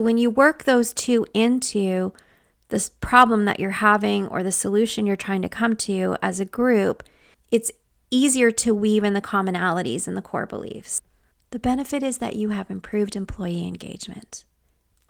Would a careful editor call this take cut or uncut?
cut